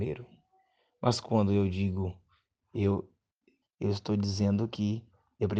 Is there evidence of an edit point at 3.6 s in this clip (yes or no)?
yes